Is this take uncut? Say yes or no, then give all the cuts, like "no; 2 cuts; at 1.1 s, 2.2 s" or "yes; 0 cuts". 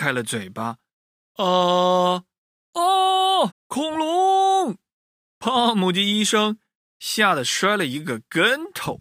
no; 1 cut; at 3.5 s